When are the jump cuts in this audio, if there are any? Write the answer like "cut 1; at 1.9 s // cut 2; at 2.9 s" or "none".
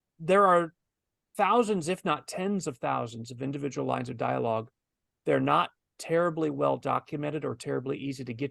none